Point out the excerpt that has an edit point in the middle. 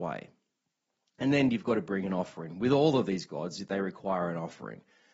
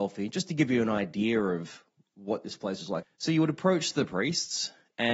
second; 1 cut; at 3.0 s

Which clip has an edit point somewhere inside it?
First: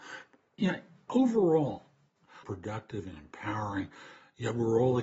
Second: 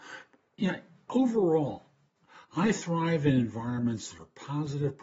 first; 1 cut; at 2.4 s

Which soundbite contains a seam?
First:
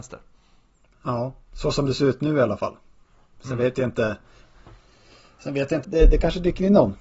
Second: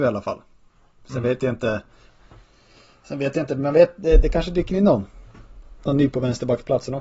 first; 1 cut; at 5.8 s

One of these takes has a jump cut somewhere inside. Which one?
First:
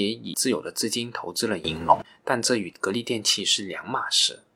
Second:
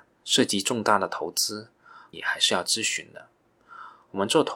second; 1 cut; at 2.1 s

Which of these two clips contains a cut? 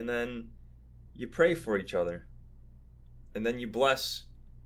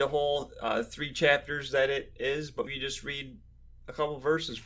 second; 1 cut; at 2.7 s

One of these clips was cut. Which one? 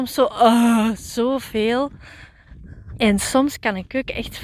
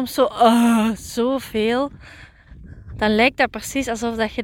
first; 1 cut; at 3.0 s

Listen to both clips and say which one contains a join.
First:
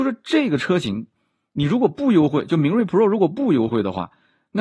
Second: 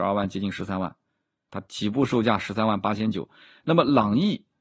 second; 1 cut; at 1.5 s

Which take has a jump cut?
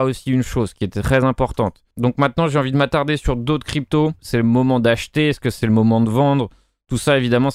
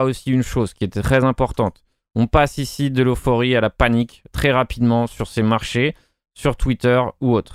first; 2 cuts; at 1.9 s, 4.2 s

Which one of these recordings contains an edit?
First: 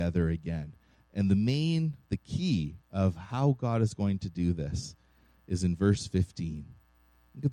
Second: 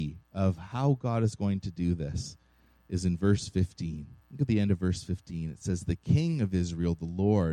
second; 1 cut; at 4.2 s

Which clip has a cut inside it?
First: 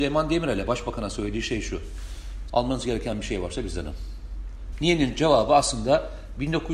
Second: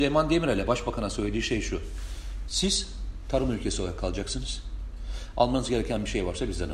first; 2 cuts; at 2.5 s, 4.7 s

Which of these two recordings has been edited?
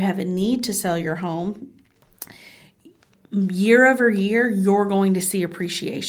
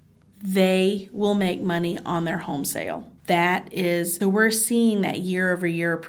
second; 2 cuts; at 3.2 s, 4.2 s

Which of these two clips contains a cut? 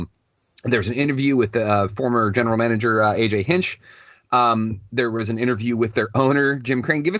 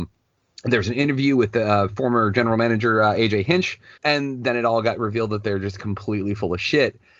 second; 1 cut; at 4.0 s

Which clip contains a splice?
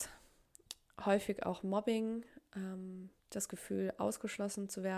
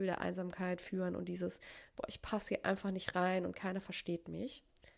first; 1 cut; at 3.2 s

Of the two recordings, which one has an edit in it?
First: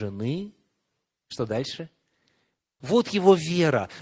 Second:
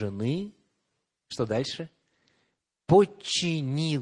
first; 1 cut; at 2.8 s

